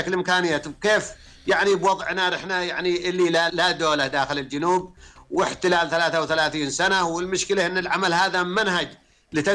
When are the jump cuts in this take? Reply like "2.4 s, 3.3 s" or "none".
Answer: 3.5 s